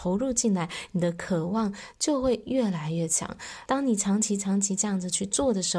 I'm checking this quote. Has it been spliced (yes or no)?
yes